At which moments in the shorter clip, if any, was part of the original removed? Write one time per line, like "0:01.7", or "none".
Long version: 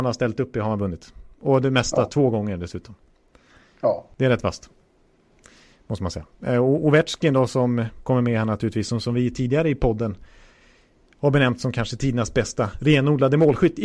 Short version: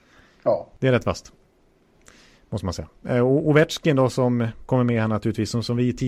none